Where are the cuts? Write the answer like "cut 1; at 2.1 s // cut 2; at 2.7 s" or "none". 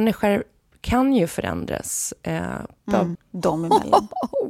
cut 1; at 3.2 s

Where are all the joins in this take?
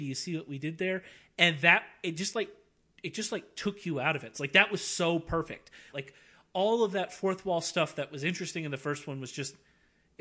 cut 1; at 4.3 s // cut 2; at 5.9 s

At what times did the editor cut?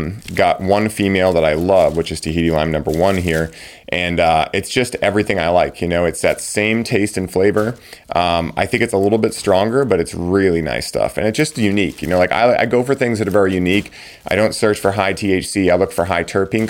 none

